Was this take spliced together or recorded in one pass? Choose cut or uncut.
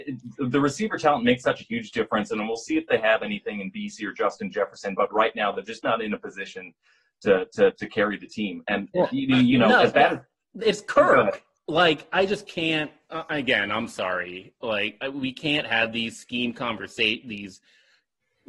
uncut